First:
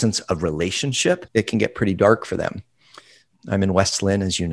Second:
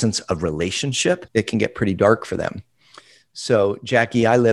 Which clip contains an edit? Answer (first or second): first